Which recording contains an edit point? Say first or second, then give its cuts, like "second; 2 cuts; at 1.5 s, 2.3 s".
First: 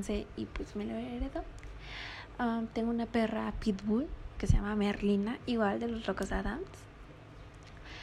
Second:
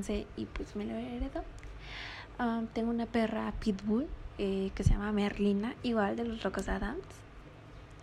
first; 1 cut; at 4.4 s